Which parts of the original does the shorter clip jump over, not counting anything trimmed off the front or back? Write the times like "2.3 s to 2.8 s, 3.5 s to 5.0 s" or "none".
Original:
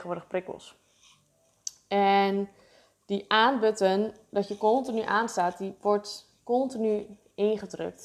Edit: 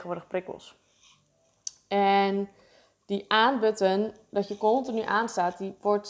none